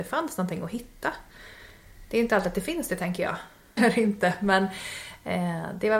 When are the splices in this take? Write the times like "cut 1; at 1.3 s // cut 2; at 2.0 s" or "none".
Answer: cut 1; at 3.8 s